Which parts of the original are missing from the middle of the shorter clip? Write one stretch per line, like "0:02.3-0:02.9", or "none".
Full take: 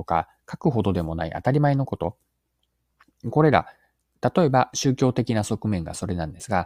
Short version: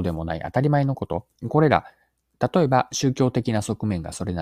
0:02.3-0:03.2

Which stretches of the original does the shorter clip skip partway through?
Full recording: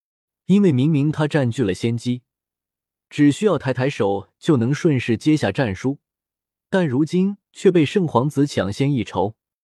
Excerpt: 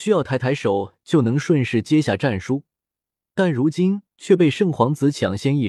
none

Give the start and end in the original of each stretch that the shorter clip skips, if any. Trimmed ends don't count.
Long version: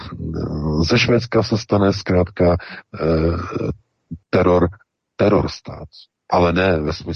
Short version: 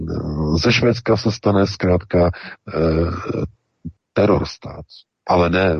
0:04.2-0:05.0

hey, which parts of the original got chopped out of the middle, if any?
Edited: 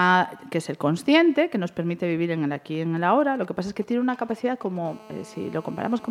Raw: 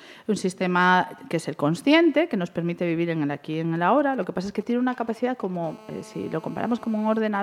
none

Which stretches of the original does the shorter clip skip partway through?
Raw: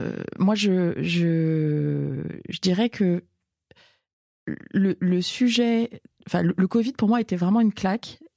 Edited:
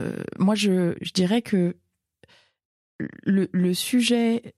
0:01.0-0:02.4

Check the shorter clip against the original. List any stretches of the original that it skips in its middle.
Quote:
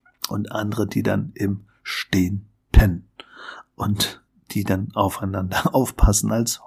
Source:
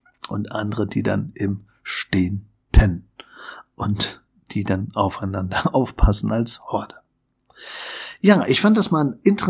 none

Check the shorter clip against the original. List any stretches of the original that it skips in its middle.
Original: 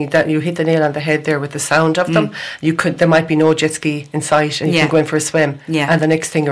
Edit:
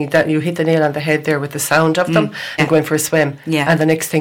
0:02.6-0:04.8

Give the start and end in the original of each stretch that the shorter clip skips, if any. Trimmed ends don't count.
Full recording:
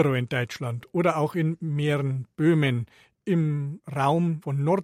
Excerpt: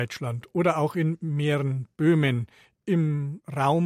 none

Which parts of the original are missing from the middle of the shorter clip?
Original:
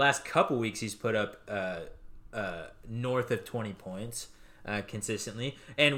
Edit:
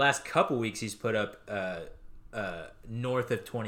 none

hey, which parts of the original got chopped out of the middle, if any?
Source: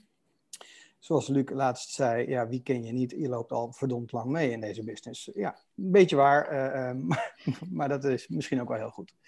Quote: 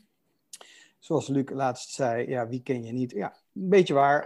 0:03.1-0:05.3

